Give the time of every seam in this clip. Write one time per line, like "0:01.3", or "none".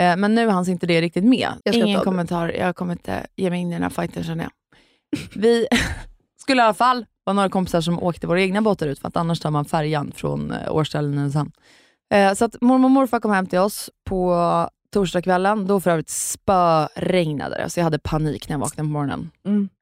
0:01.6

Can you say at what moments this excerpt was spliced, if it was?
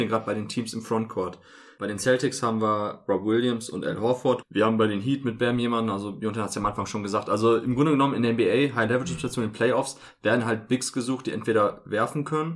0:04.4

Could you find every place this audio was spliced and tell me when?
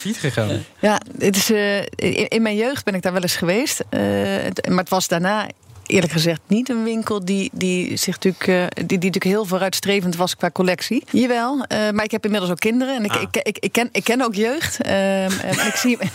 0:11.1

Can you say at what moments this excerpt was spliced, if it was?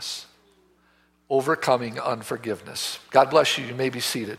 none

